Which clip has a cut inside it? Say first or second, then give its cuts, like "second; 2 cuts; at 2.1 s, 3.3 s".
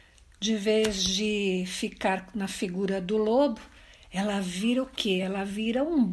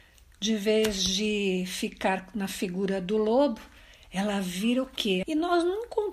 second; 1 cut; at 5.2 s